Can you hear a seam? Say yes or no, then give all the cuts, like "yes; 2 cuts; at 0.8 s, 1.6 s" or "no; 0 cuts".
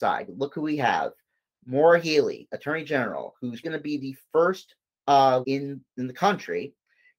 yes; 2 cuts; at 3.6 s, 5.4 s